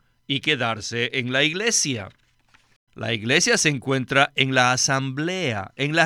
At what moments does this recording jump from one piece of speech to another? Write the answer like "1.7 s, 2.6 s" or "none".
2.9 s